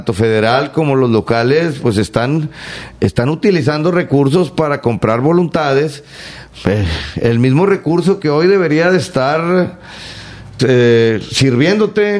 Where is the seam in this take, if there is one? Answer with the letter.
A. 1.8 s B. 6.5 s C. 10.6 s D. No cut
C